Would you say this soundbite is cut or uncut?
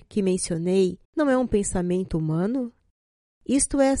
cut